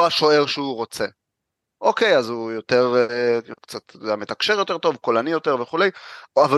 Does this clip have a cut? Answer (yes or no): yes